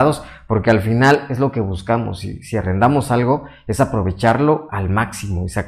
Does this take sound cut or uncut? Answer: uncut